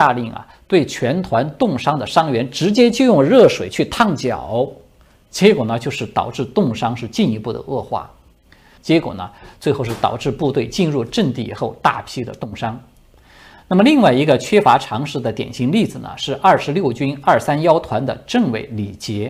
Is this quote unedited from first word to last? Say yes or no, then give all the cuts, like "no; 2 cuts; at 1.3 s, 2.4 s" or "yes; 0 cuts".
no; 1 cut; at 8.8 s